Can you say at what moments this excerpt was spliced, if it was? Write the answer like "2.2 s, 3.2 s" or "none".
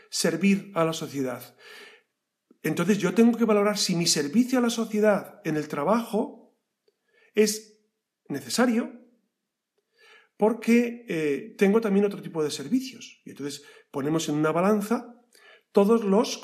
none